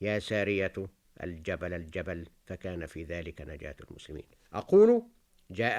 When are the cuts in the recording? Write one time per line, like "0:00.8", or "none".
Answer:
0:04.4